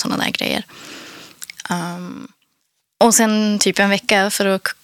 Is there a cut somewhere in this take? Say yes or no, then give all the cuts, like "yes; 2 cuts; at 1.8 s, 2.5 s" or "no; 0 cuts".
no; 0 cuts